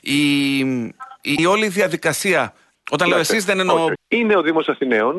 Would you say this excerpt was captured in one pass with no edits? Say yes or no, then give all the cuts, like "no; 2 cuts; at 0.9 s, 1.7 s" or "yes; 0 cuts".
no; 3 cuts; at 1.4 s, 2.8 s, 4.0 s